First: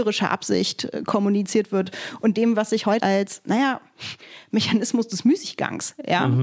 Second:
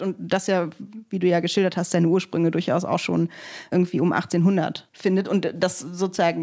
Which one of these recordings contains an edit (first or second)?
first